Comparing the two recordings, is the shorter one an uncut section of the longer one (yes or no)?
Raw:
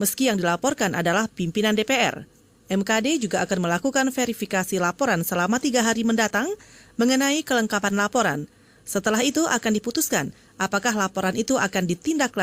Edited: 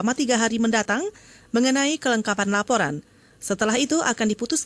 yes